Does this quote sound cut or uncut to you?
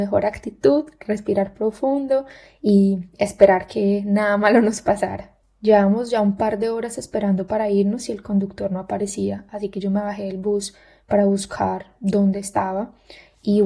uncut